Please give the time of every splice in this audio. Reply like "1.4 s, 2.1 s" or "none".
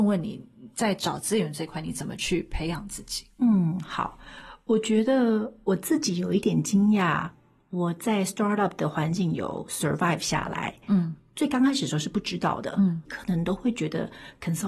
13.1 s